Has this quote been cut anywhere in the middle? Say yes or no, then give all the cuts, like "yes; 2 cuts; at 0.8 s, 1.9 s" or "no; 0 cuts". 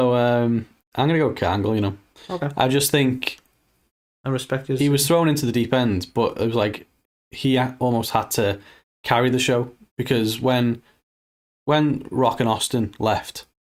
no; 0 cuts